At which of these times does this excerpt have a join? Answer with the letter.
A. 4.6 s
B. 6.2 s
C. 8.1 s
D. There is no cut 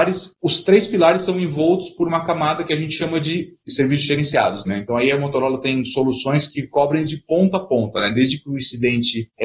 A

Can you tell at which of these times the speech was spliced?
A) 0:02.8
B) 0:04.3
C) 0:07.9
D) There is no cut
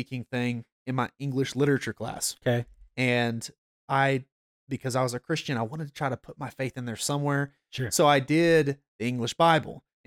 D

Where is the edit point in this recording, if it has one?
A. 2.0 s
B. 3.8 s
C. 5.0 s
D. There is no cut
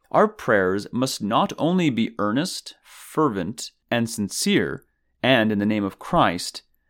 D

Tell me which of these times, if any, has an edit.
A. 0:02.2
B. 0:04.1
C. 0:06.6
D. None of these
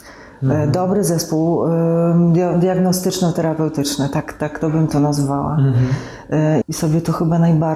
C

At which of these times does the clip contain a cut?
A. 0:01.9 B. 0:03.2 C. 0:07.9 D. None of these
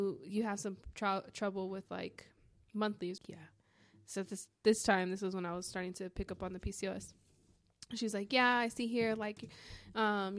B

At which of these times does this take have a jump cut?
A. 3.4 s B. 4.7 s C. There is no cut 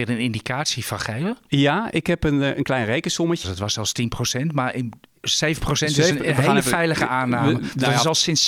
A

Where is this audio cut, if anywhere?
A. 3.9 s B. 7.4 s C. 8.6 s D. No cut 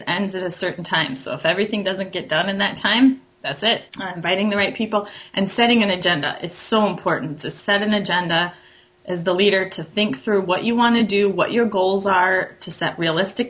A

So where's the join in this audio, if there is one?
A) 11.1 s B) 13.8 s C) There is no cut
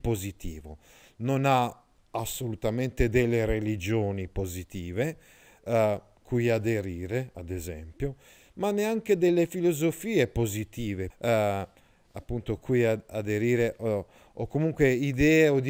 A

